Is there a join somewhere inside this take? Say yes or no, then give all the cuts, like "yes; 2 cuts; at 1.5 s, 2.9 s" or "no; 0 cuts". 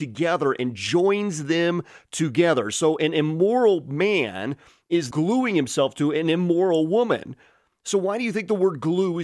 yes; 2 cuts; at 5.1 s, 7.7 s